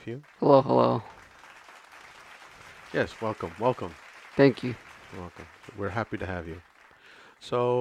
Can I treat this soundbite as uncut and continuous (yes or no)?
yes